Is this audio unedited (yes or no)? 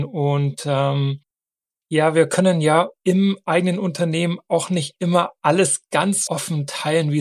no